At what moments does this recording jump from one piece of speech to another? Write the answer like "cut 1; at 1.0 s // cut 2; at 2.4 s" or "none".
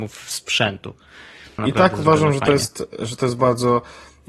cut 1; at 1.6 s